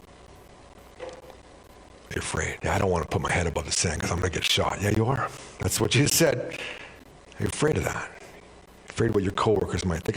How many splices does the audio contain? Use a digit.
1